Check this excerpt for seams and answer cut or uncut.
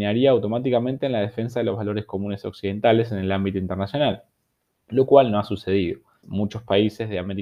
cut